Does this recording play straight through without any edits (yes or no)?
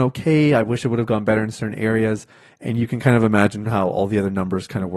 yes